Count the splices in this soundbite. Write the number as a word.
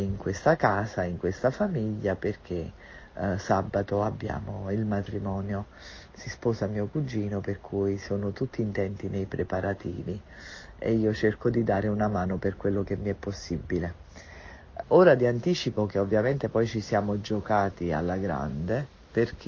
one